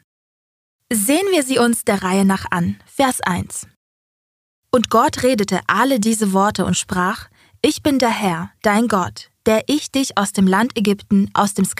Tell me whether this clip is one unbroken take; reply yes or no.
yes